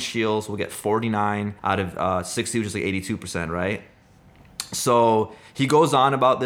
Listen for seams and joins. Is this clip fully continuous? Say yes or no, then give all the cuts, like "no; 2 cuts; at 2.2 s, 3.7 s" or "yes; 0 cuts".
no; 1 cut; at 1.6 s